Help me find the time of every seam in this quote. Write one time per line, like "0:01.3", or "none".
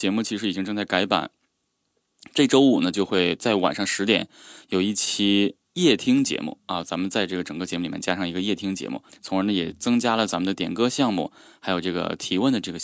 0:09.1